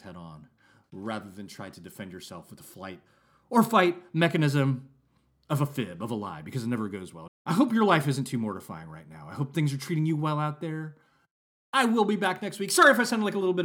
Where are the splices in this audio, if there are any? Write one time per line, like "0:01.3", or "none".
0:07.3